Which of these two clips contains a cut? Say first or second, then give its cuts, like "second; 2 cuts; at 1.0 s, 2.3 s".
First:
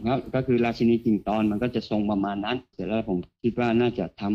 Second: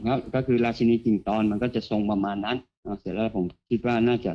first; 1 cut; at 2.7 s